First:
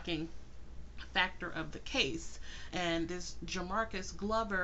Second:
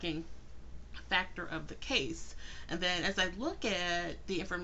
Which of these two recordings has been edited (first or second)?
first